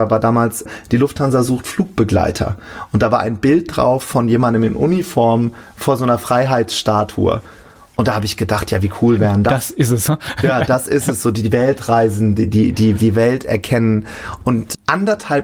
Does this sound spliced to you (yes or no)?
no